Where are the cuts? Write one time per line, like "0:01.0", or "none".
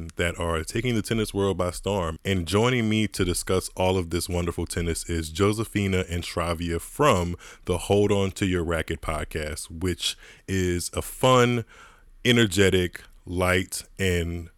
0:02.2